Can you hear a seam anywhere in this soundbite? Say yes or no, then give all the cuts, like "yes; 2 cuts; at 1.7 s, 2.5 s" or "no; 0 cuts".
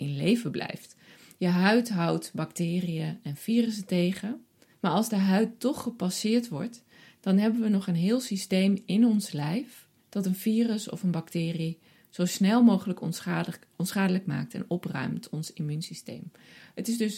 yes; 2 cuts; at 4.7 s, 10.0 s